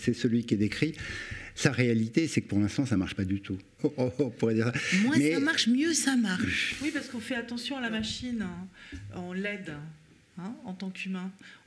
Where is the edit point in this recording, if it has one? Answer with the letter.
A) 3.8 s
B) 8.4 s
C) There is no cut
A